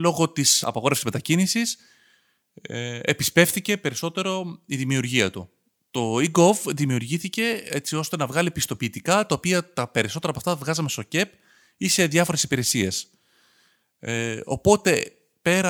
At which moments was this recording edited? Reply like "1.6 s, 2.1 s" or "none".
none